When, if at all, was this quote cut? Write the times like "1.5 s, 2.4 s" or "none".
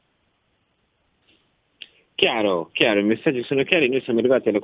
none